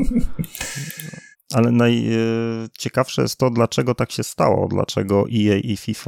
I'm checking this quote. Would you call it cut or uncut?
cut